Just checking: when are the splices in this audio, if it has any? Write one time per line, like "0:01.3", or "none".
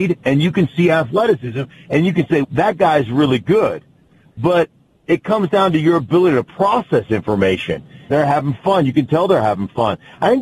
0:02.4
0:08.1